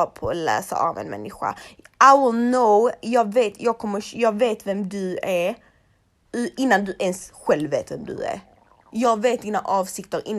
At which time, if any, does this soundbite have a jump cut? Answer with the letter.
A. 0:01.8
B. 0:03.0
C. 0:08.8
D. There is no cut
D